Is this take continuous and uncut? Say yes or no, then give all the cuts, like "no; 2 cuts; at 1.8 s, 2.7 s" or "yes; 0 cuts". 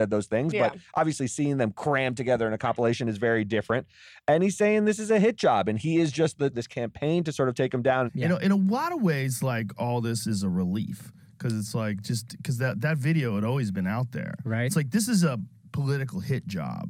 no; 2 cuts; at 6.5 s, 8.1 s